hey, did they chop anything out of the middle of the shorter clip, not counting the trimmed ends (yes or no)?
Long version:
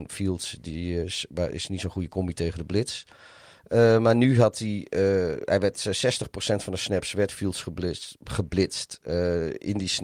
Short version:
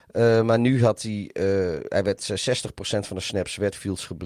no